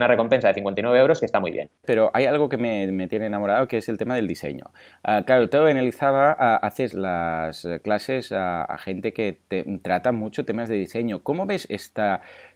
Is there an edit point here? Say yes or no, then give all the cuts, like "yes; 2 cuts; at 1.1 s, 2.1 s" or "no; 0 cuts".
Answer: yes; 2 cuts; at 1.8 s, 6.9 s